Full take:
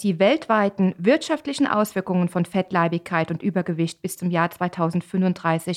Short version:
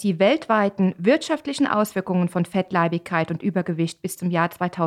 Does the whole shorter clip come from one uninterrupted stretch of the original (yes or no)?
yes